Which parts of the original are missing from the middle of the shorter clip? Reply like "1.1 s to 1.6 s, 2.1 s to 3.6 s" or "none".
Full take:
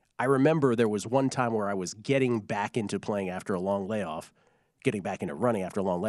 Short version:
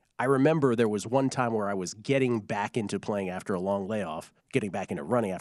4.4 s to 4.7 s